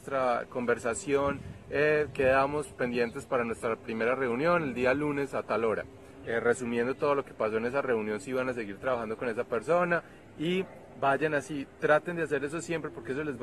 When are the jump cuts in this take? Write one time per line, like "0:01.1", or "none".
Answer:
0:06.2